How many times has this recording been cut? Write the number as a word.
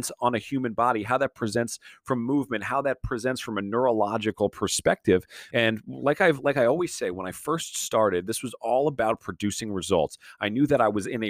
one